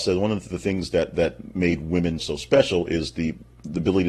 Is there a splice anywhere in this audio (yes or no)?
yes